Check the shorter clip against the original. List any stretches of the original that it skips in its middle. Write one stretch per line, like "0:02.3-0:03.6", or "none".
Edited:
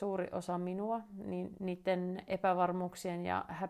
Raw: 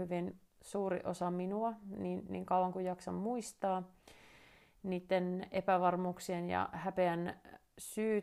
0:02.3-0:04.8